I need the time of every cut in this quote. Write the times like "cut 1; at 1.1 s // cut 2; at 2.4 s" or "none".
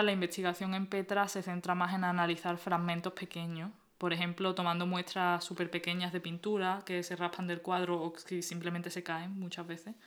none